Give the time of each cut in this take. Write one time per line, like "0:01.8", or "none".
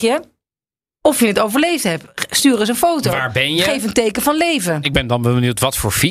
none